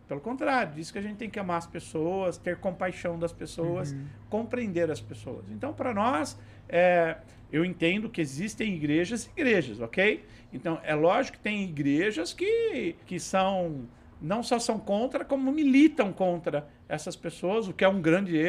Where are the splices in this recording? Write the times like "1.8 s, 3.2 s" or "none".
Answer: 13.0 s